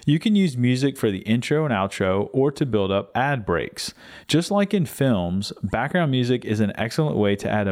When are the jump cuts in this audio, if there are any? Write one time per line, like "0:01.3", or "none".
0:04.2